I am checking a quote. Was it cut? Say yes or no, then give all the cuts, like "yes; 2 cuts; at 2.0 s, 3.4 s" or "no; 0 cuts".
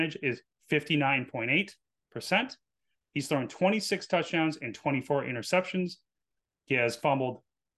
no; 0 cuts